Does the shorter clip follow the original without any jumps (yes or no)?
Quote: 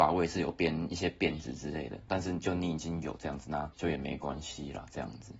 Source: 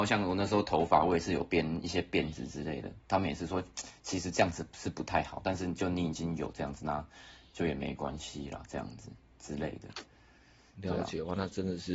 no